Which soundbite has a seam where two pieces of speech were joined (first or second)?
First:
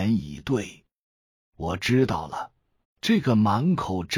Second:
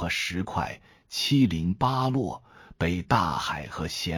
first